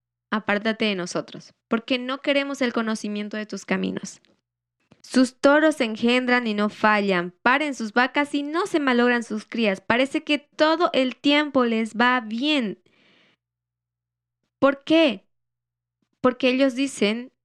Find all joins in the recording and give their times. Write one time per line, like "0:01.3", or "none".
0:05.0